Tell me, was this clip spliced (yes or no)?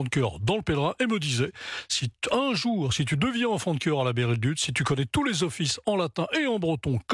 no